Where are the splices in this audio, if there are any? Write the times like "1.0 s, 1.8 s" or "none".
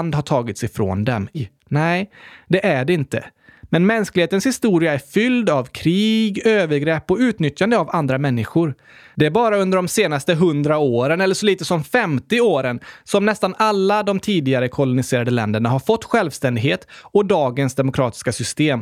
1.3 s